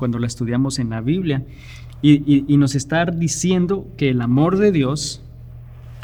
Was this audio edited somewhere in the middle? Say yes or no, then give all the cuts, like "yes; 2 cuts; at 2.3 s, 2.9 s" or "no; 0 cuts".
no; 0 cuts